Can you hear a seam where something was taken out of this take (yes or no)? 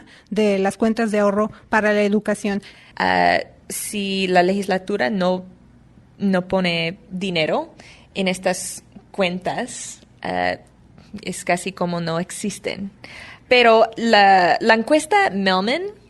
yes